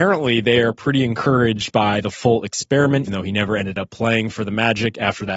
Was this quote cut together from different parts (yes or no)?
yes